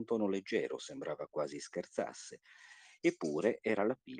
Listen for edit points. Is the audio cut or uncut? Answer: uncut